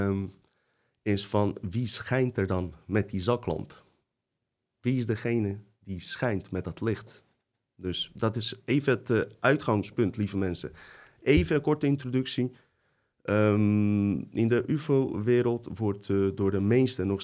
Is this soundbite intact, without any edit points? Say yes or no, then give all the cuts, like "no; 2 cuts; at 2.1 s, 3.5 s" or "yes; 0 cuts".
yes; 0 cuts